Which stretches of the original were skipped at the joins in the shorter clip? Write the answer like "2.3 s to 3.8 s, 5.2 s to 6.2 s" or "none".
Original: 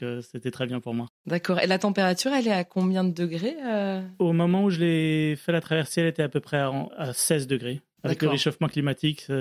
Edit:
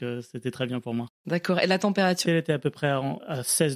2.3 s to 6.0 s